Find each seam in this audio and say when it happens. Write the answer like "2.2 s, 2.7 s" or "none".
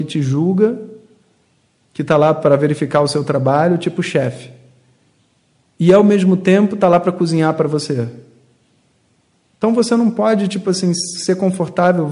none